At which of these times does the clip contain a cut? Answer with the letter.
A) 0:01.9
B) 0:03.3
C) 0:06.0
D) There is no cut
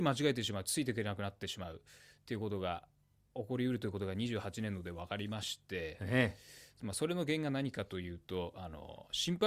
D